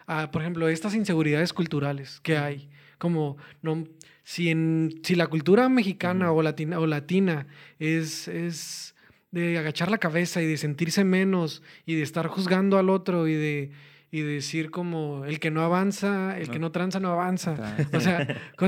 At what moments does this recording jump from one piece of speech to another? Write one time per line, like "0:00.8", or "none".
none

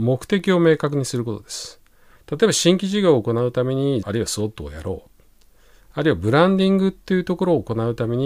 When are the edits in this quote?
0:02.1
0:04.0

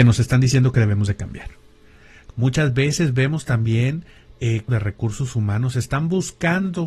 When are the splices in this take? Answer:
0:02.3
0:04.7

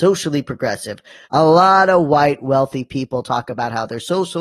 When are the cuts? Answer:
0:01.2

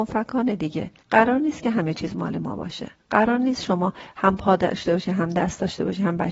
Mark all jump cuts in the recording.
0:01.0
0:03.0

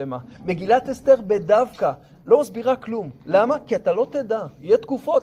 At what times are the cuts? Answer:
none

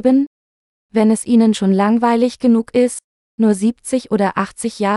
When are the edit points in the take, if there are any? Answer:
none

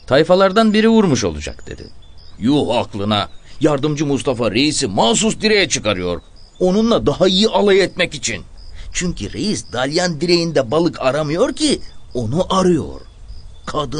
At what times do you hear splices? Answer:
0:02.4

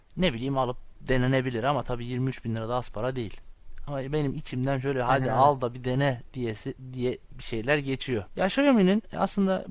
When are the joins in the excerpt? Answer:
0:08.3

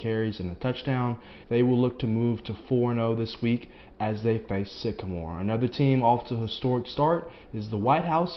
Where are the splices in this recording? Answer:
0:01.4

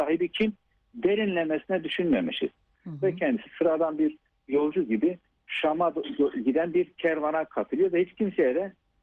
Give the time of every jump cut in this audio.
0:02.7

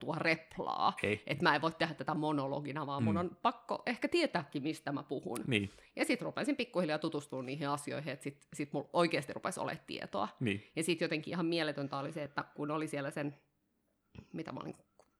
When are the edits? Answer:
none

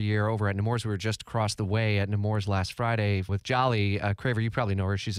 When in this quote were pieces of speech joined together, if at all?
0:03.3

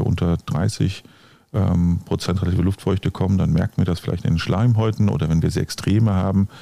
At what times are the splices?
none

